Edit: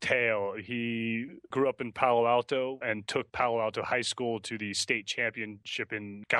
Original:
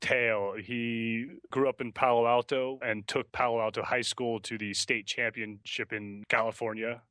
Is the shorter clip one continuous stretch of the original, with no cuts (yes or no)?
yes